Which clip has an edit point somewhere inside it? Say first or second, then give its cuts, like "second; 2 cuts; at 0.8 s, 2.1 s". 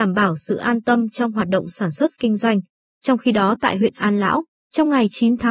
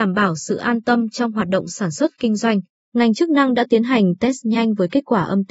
second; 1 cut; at 2.8 s